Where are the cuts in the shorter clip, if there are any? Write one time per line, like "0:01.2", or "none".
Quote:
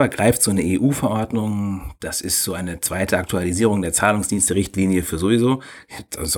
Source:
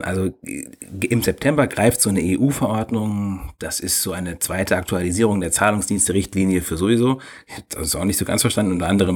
none